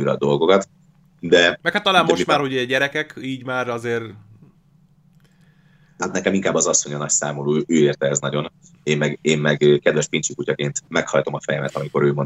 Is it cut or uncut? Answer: cut